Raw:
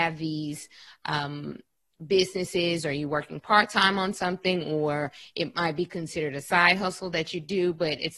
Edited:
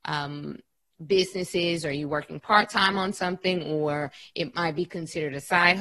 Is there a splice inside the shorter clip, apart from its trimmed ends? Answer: no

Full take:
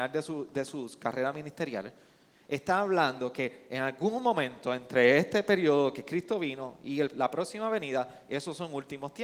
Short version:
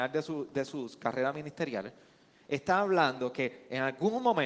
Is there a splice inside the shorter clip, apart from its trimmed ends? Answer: no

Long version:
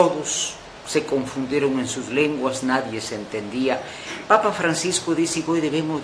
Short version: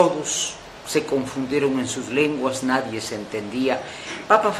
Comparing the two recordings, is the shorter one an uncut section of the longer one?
yes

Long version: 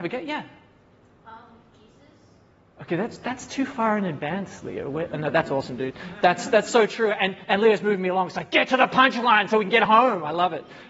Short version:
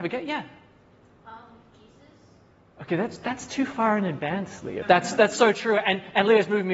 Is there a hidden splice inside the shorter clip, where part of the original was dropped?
yes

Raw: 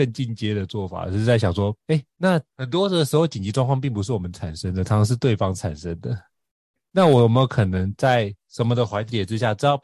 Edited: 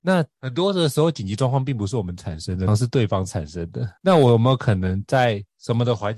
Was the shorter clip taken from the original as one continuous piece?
no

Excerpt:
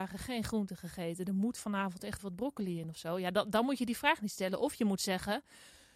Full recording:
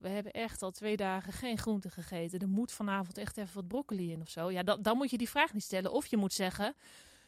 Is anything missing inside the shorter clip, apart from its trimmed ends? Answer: yes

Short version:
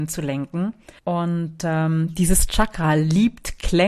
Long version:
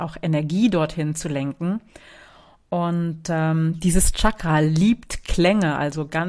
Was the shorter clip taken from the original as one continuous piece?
no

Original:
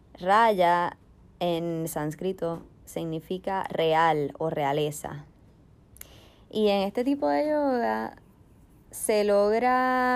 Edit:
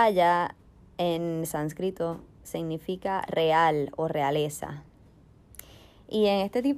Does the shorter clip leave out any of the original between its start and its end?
no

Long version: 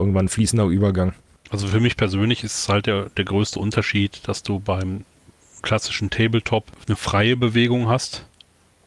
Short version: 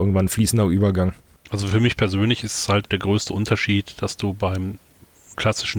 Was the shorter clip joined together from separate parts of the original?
yes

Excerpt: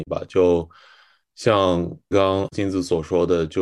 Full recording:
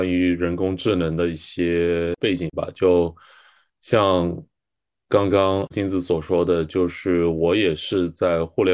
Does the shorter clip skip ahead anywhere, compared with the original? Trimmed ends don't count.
yes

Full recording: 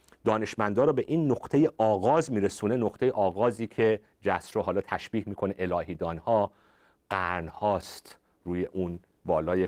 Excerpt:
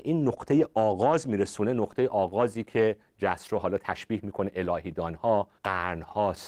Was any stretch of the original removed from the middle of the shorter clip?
yes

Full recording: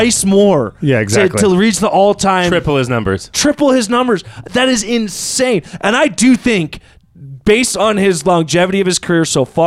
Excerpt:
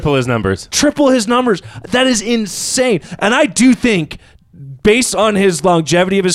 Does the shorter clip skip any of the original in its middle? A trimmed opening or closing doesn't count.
no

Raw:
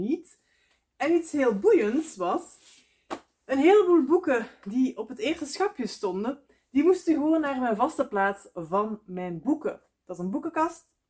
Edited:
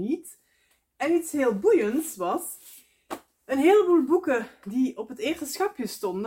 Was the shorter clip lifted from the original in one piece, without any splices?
yes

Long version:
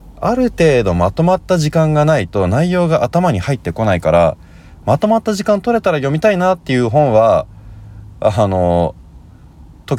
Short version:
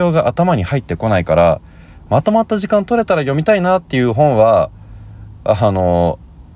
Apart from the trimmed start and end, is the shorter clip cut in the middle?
no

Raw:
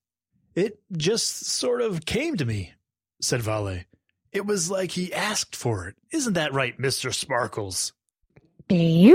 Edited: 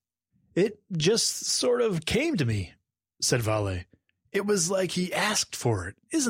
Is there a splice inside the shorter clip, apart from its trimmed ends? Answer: no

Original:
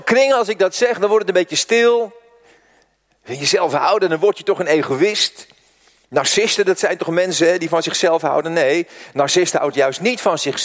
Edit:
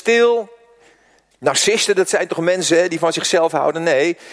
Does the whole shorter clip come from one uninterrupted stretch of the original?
no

